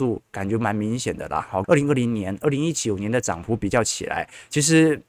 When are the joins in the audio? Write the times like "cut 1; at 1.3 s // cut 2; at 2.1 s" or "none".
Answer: cut 1; at 1.6 s